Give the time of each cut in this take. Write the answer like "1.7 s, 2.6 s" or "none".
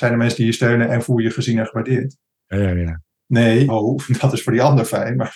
2.4 s, 3.7 s